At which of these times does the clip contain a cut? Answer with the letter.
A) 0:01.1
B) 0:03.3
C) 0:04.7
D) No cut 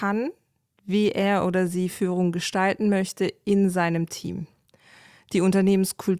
D